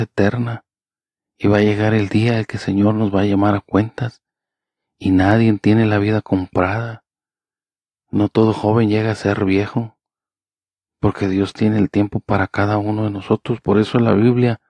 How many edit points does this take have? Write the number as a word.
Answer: zero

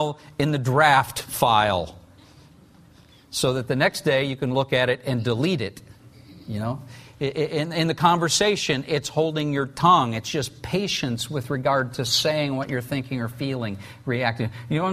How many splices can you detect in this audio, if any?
zero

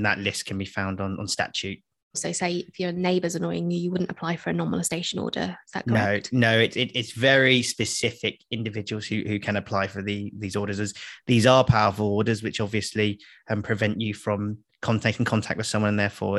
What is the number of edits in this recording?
one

